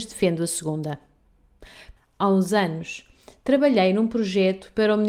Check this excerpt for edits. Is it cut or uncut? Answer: cut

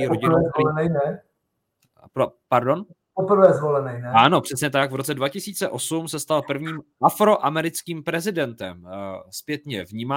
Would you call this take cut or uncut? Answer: uncut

